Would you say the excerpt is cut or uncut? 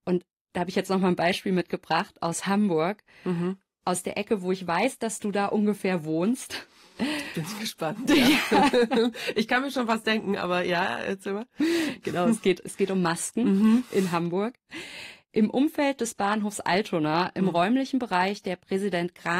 uncut